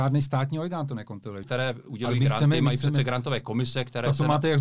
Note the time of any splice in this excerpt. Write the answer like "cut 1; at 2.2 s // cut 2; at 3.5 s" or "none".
cut 1; at 1.4 s

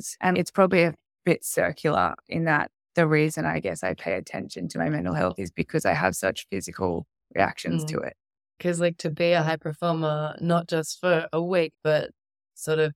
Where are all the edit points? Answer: cut 1; at 8.6 s // cut 2; at 11.7 s

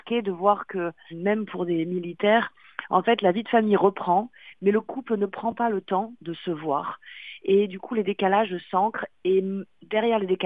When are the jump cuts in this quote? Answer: cut 1; at 1.1 s

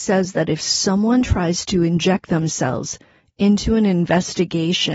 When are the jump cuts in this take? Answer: none

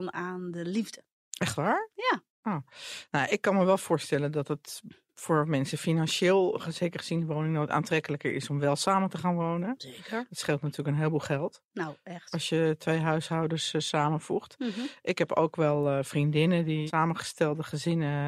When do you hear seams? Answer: none

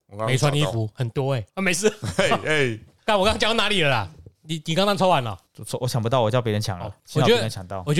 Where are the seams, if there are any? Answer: none

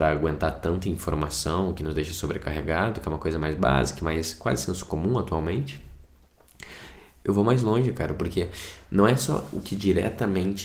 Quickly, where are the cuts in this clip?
none

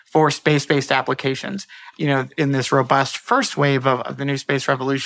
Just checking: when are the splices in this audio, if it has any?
cut 1; at 1.9 s

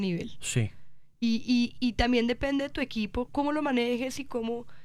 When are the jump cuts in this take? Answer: cut 1; at 3.3 s

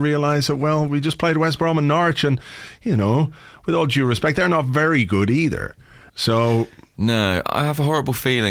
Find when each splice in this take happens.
cut 1; at 6.1 s // cut 2; at 7.4 s

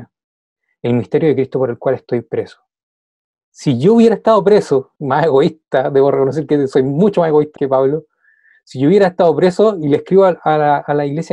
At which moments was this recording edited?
cut 1; at 3.4 s // cut 2; at 5.0 s // cut 3; at 7.6 s

